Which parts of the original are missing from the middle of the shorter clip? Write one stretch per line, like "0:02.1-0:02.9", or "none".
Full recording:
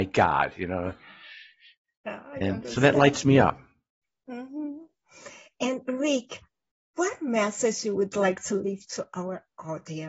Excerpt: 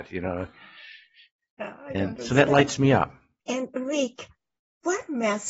0:03.9-0:05.5